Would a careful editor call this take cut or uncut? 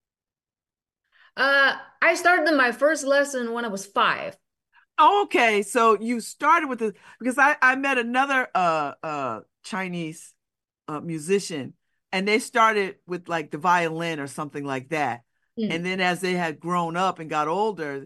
uncut